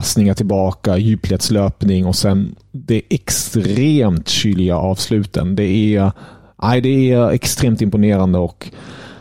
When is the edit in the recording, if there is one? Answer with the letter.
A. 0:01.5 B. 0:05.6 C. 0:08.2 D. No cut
D